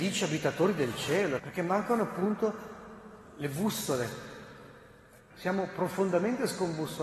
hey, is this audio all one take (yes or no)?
no